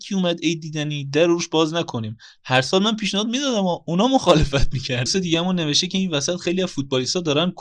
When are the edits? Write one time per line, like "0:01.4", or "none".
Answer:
0:05.1